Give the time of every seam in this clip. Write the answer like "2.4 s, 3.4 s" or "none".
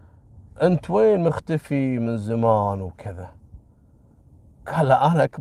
none

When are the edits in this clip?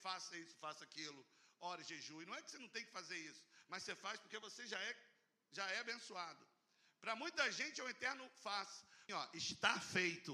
9.1 s

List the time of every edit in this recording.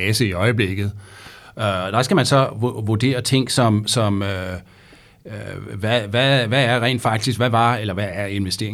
none

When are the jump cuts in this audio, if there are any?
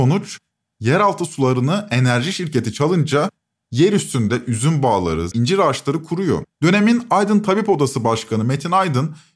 5.3 s, 6.5 s

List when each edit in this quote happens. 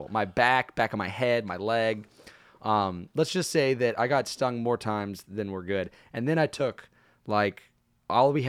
none

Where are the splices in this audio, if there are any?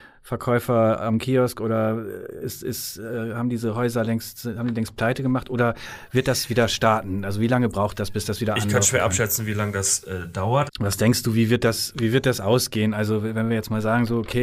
10.7 s

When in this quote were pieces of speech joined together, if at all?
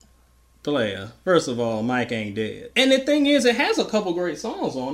2.7 s

